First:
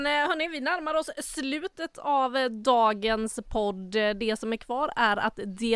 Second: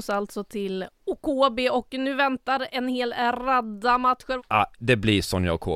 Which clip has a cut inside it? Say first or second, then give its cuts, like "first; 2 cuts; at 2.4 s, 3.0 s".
second; 1 cut; at 4.4 s